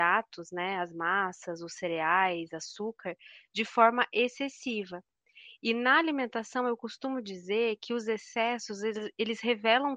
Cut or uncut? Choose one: uncut